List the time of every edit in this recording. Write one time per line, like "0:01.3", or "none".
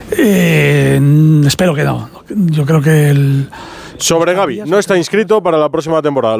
0:04.0